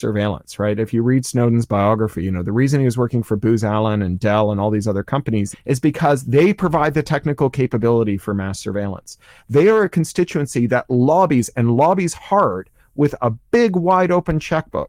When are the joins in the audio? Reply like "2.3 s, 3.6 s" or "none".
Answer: 5.5 s